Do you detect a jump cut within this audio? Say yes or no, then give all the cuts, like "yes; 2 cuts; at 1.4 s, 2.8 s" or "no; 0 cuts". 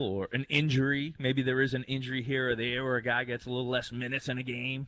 no; 0 cuts